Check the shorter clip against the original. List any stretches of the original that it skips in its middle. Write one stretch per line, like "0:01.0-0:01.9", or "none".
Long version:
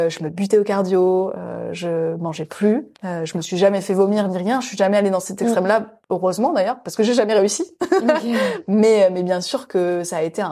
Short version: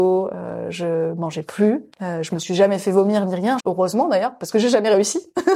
0:04.6-0:06.0